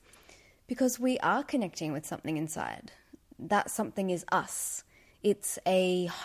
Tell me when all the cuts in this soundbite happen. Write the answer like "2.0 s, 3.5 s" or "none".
none